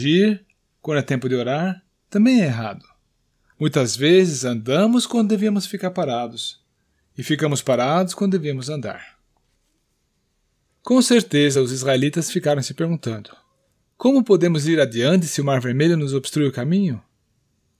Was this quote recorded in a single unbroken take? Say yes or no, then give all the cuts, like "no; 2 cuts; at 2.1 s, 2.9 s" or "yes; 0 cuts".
yes; 0 cuts